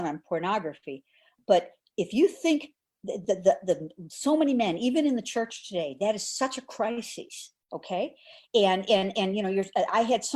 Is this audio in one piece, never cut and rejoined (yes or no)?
yes